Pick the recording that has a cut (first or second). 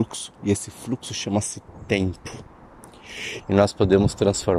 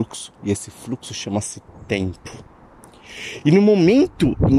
first